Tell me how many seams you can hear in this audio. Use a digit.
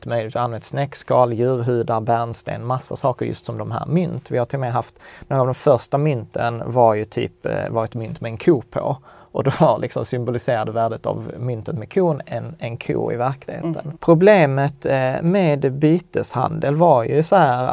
1